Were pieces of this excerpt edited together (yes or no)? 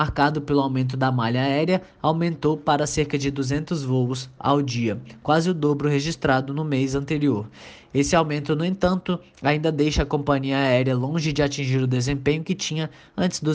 no